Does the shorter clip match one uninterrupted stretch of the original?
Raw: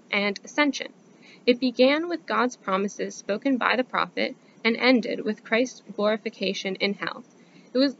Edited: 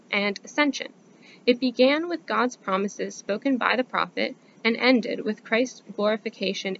yes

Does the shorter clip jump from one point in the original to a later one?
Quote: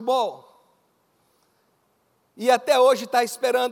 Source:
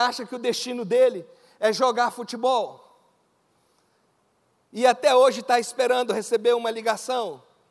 no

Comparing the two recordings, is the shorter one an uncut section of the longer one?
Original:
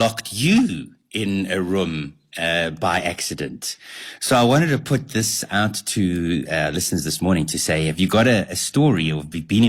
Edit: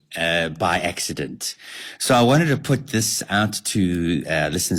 yes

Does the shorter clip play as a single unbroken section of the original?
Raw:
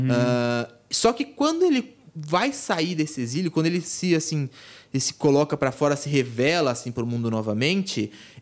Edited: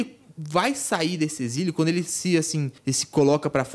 no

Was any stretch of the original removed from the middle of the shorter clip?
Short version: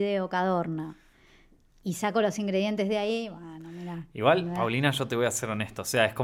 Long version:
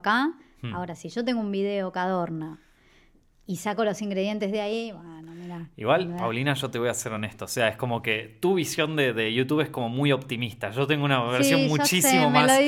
no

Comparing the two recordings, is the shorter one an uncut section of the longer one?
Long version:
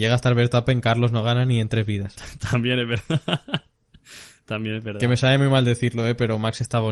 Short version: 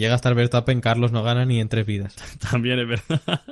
yes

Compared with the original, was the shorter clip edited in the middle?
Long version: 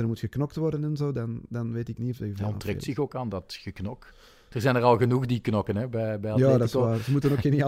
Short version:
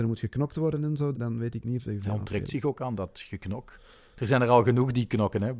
yes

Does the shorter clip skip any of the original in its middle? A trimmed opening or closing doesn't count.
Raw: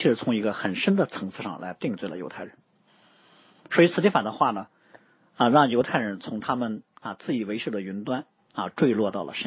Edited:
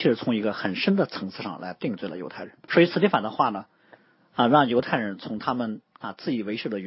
yes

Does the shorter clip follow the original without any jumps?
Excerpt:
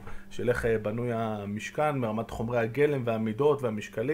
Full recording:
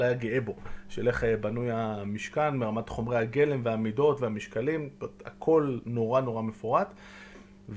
yes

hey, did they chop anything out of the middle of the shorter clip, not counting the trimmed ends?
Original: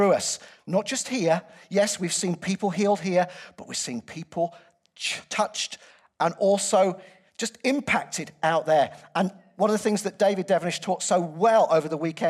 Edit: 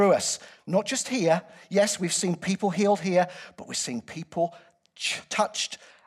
no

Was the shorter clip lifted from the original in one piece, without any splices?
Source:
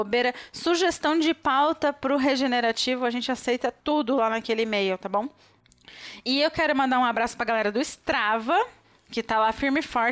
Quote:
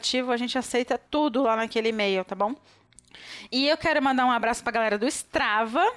yes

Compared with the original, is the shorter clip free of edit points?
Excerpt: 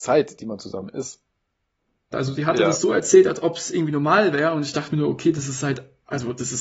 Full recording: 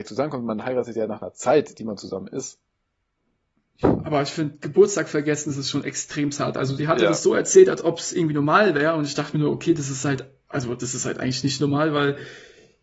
no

